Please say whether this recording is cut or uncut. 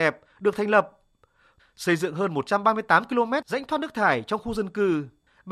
cut